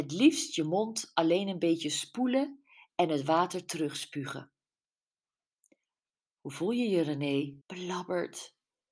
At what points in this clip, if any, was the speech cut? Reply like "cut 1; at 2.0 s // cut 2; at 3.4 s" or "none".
cut 1; at 7.6 s